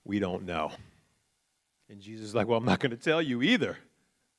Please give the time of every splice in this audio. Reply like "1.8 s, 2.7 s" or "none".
none